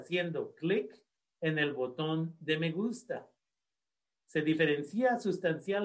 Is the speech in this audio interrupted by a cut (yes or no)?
yes